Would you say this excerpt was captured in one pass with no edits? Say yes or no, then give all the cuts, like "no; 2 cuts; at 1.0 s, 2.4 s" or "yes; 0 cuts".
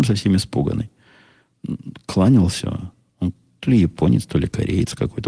yes; 0 cuts